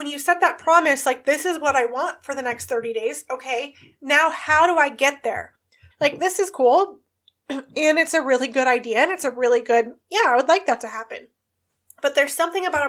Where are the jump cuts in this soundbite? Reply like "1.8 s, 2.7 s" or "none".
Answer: 5.9 s

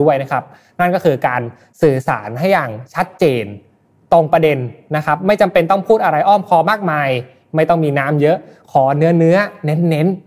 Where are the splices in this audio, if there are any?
none

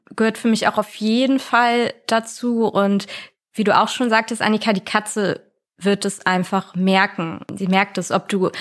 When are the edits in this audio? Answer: none

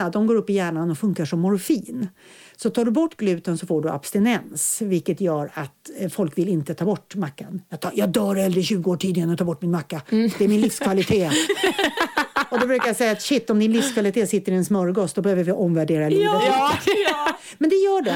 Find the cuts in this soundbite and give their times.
none

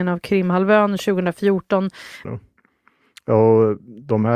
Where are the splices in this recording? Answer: 2.2 s

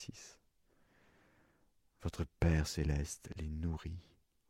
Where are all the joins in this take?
none

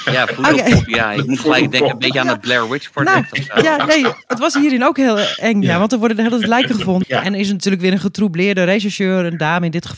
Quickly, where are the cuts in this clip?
7.0 s

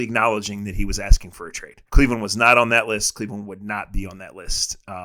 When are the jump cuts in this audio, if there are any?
1.9 s

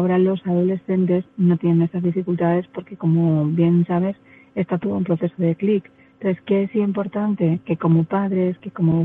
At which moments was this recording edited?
none

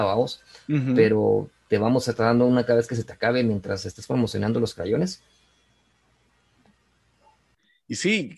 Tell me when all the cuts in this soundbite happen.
none

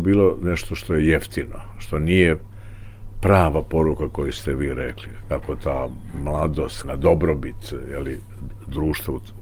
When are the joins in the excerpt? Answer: 5.2 s, 6.8 s

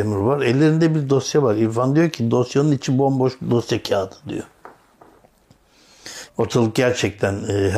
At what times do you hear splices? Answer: 6.3 s

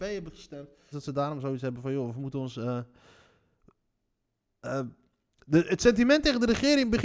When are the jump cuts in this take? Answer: 0.9 s

